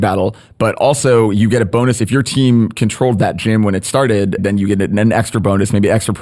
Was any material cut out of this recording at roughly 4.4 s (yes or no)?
yes